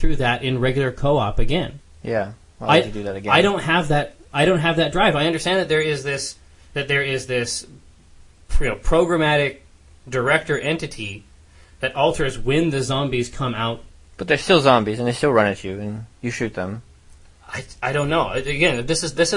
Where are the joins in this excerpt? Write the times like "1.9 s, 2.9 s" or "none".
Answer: none